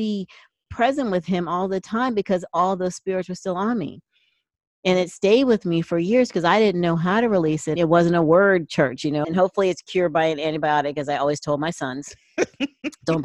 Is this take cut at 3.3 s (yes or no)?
no